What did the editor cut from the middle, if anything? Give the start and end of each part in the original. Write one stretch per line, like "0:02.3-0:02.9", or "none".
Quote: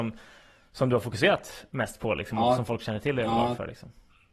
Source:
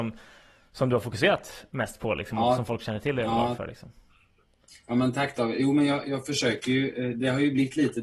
none